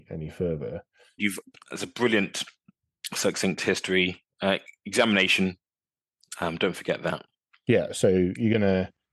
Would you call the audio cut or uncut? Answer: cut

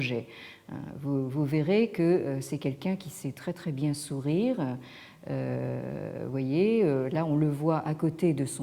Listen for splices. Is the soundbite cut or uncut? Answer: uncut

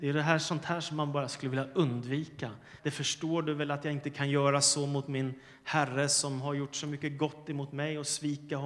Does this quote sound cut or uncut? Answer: cut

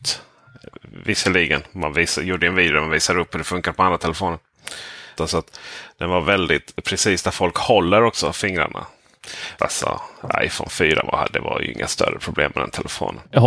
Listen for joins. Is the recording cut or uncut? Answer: cut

